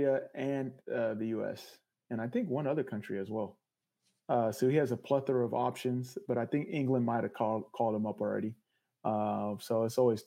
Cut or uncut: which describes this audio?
uncut